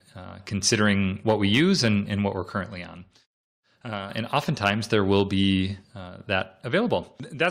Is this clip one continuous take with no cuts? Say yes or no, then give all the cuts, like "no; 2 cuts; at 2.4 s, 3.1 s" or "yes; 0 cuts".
yes; 0 cuts